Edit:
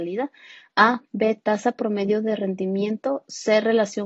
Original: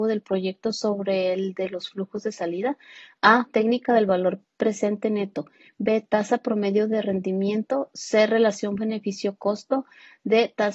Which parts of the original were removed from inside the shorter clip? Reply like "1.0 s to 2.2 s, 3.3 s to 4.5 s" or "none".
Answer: 3.5 s to 5.7 s